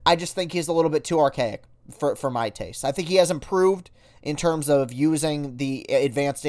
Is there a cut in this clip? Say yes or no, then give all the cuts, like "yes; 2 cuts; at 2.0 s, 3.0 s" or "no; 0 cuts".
no; 0 cuts